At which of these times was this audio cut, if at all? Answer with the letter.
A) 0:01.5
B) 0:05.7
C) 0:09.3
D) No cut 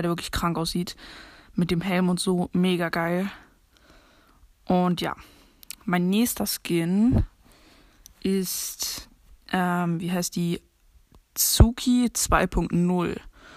D